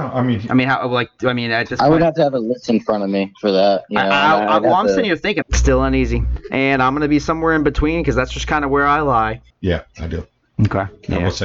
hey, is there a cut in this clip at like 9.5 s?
yes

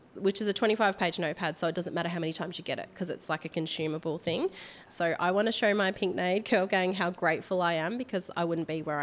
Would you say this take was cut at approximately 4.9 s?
yes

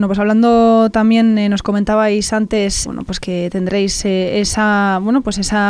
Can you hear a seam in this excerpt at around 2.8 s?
yes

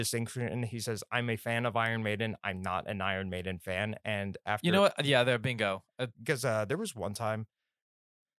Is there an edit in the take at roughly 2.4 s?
no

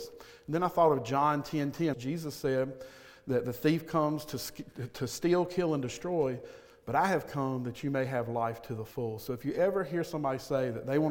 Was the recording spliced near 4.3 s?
no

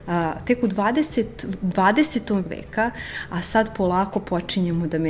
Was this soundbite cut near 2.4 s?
yes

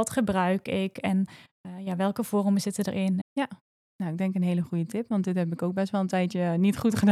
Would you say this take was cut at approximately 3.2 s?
yes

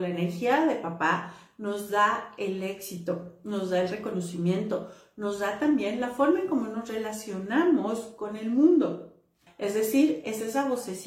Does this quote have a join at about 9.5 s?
yes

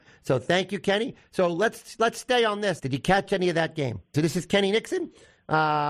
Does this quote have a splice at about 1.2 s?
no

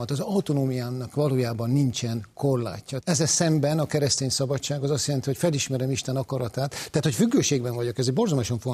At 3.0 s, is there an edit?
yes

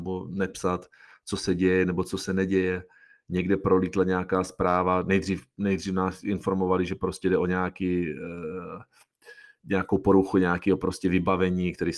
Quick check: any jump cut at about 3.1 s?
no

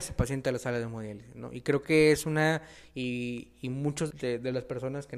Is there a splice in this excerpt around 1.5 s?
no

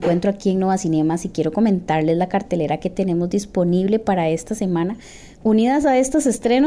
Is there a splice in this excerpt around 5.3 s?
yes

